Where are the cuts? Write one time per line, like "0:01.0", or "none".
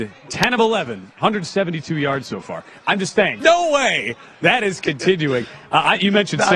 0:03.4

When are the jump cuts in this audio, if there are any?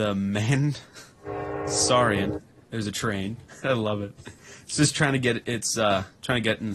0:03.6

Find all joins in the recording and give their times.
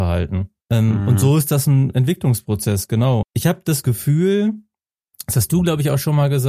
0:03.2

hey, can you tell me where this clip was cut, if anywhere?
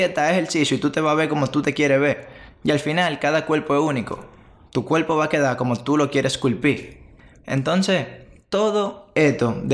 none

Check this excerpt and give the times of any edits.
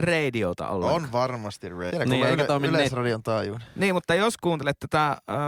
0:01.9

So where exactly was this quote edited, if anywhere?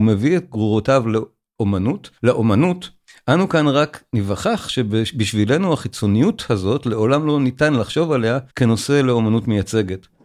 0:02.2
0:08.5

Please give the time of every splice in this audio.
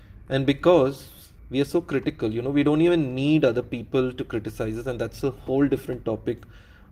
0:01.4

